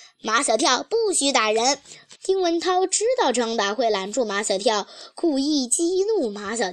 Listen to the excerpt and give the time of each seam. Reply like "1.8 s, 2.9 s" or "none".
2.2 s